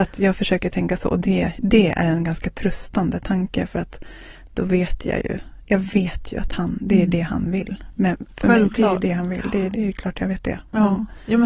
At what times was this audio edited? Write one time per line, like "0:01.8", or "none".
0:09.7